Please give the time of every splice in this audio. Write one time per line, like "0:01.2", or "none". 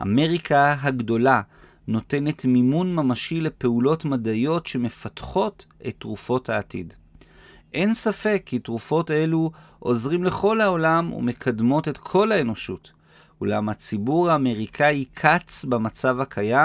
none